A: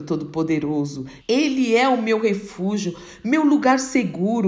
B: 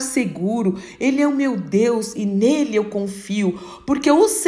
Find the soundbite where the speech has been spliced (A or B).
A